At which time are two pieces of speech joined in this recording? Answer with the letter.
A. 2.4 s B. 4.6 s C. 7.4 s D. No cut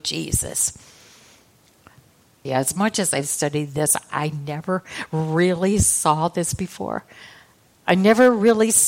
A